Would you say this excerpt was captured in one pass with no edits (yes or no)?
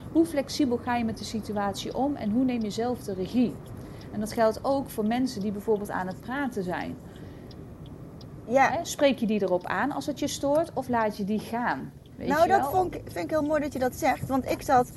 yes